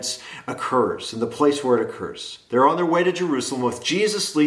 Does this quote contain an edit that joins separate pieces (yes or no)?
no